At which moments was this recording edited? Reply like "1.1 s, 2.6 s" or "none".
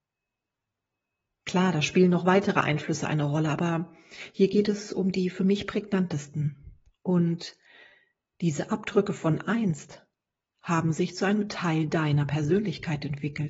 1.4 s

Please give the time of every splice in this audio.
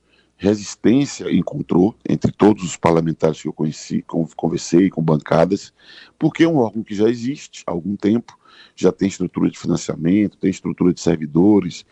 2.0 s

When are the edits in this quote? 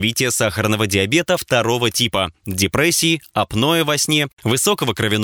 none

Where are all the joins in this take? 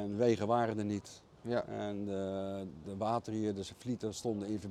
1.4 s, 2.8 s

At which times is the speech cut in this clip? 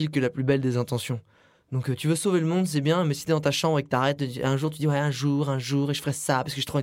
none

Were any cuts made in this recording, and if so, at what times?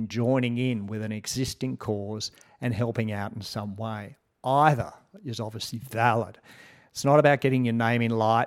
none

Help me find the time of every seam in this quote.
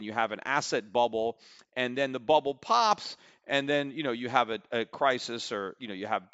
none

